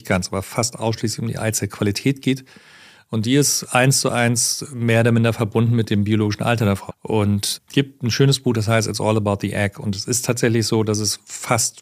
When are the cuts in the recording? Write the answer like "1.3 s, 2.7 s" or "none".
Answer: 6.9 s

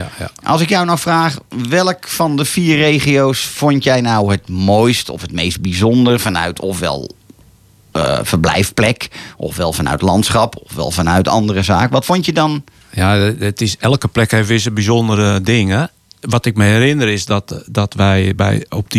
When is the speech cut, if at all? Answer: none

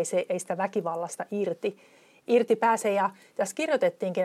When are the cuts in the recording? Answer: none

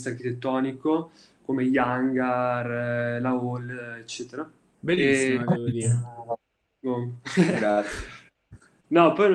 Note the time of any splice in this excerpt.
4.7 s

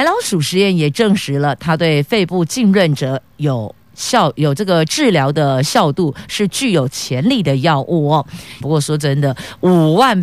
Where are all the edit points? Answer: 8.6 s

